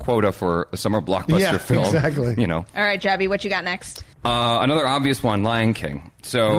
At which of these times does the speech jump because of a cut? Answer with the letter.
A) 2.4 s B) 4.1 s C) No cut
B